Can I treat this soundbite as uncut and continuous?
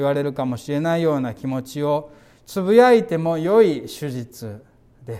yes; 0 cuts

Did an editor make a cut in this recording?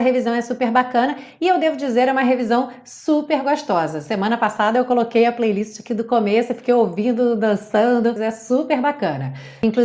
yes; 1 cut; at 8.2 s

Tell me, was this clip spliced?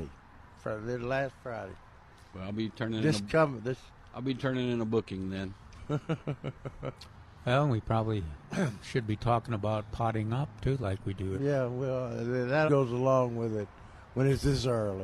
yes; 2 cuts; at 11.4 s, 12.7 s

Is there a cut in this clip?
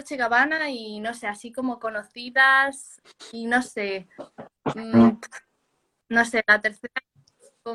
no; 0 cuts

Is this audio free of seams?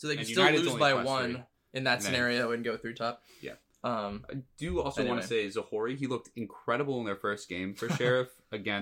yes; 0 cuts

